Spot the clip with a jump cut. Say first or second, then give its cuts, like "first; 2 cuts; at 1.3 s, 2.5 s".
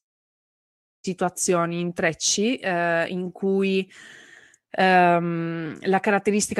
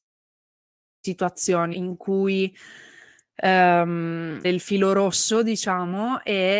second; 2 cuts; at 1.7 s, 4.4 s